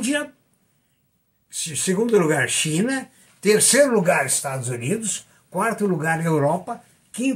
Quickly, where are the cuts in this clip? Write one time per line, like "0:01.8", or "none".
none